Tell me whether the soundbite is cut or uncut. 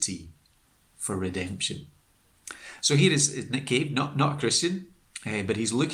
uncut